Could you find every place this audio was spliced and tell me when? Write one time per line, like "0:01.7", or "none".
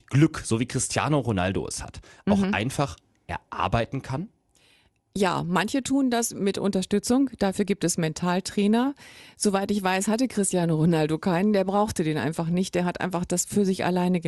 none